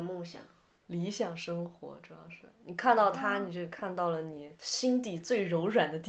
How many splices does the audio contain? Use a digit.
0